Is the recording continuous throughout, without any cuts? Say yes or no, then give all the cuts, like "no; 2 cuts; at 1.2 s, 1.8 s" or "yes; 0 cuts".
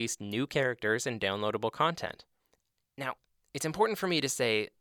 yes; 0 cuts